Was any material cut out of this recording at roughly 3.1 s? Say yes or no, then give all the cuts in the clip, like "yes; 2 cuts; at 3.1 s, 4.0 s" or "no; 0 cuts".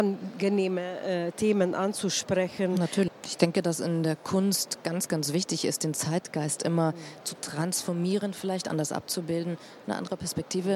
yes; 1 cut; at 3.1 s